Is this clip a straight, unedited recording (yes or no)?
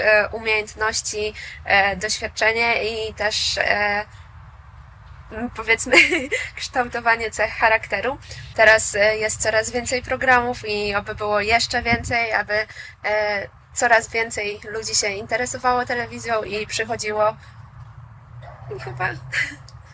no